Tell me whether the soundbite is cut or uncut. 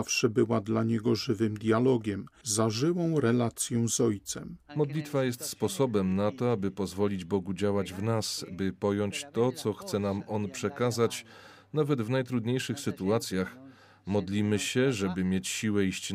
cut